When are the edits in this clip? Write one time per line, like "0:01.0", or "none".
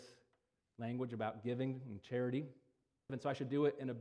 0:03.1